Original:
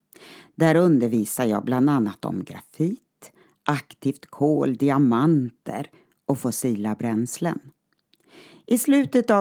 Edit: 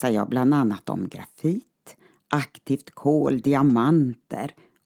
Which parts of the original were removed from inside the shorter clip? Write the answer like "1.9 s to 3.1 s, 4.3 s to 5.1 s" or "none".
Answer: none